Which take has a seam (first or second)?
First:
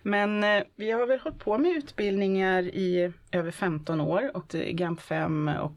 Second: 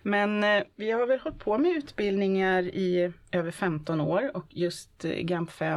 first